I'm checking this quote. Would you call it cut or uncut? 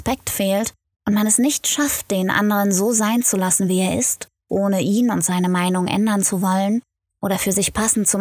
uncut